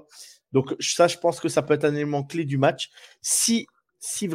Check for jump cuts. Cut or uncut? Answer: uncut